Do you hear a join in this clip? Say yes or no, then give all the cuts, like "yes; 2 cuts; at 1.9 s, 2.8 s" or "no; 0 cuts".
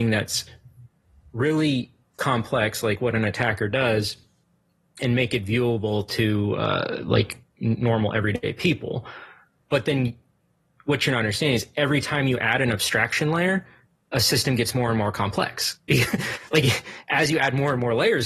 no; 0 cuts